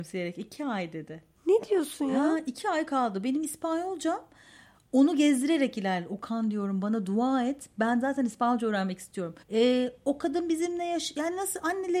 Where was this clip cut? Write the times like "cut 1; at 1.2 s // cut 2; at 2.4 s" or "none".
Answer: cut 1; at 9.4 s